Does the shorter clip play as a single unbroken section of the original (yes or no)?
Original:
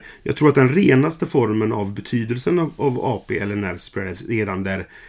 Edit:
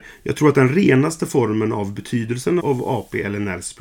no